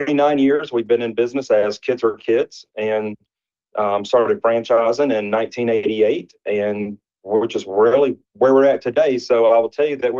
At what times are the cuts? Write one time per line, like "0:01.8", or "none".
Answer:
none